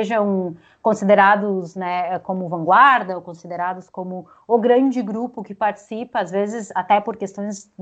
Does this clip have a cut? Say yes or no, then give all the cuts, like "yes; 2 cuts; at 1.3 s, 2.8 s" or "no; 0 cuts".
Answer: no; 0 cuts